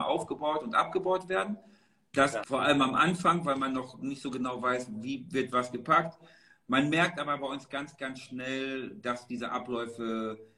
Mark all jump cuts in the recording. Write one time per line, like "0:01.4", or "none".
0:02.4